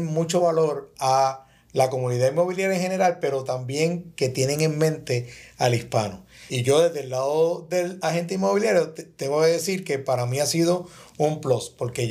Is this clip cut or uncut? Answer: cut